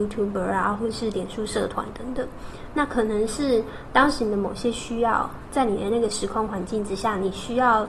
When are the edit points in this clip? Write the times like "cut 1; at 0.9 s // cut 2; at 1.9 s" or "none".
none